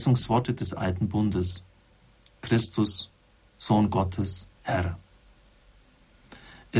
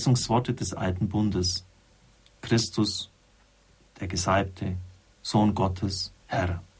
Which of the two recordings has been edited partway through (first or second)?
first